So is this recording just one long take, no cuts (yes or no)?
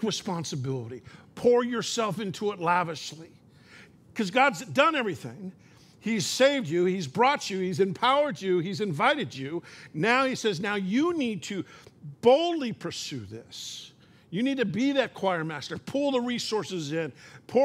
yes